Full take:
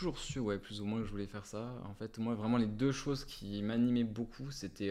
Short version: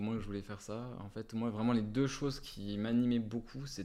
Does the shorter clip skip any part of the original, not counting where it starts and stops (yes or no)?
no